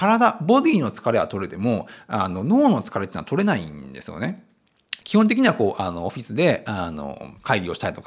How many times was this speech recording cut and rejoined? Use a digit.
1